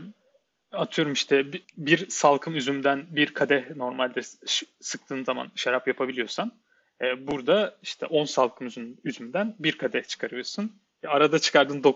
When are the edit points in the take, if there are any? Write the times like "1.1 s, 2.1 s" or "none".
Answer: 1.6 s

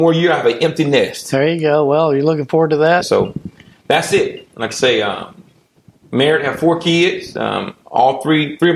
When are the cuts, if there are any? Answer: 3.0 s

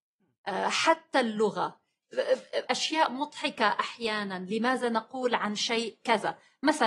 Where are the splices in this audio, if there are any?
2.7 s

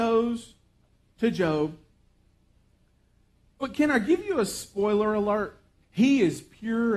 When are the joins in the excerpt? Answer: 5.8 s

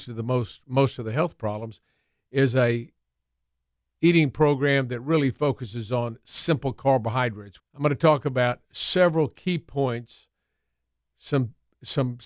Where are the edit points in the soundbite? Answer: 7.6 s

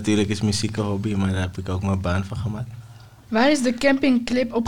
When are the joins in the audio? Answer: 3.3 s

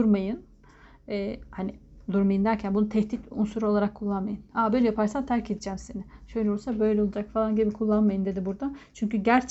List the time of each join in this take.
none

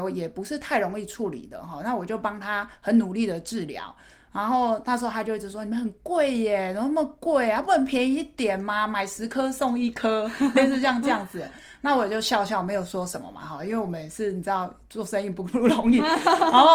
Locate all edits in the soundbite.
none

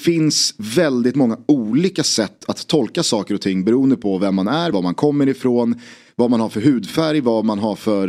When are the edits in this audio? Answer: 4.7 s

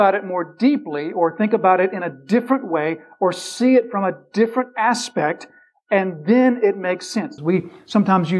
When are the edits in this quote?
7.4 s

